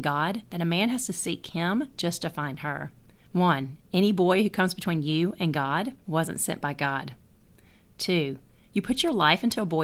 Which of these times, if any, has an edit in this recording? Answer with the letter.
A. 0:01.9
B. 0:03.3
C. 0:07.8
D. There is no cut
B